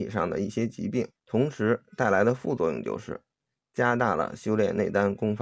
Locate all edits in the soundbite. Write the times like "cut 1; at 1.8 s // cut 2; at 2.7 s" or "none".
cut 1; at 1.2 s